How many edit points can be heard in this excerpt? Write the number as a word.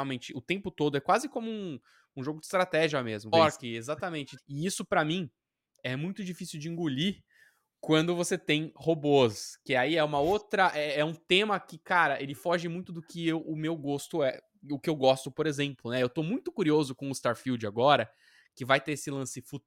two